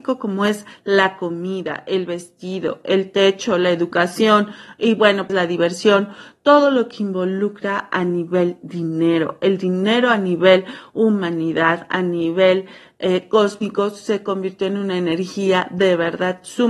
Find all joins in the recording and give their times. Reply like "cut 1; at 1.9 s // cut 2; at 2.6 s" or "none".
cut 1; at 5.3 s